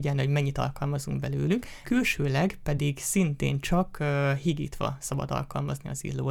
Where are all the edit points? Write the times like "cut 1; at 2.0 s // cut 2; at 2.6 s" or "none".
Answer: cut 1; at 1.8 s